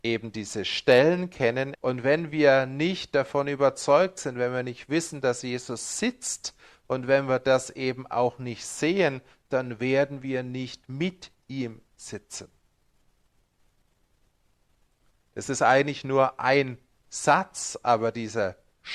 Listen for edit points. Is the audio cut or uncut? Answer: cut